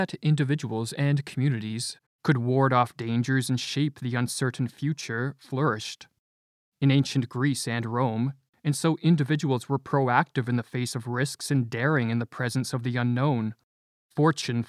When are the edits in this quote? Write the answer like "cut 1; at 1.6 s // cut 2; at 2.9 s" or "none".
cut 1; at 2.1 s // cut 2; at 8.5 s